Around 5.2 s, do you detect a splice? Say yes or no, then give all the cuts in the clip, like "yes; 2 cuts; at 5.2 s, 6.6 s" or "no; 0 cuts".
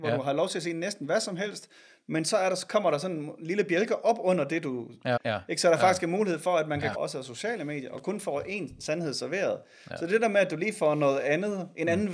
yes; 2 cuts; at 5.2 s, 6.9 s